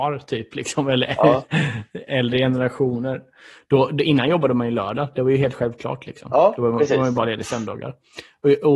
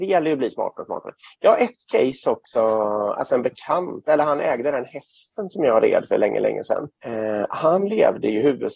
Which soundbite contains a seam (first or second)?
second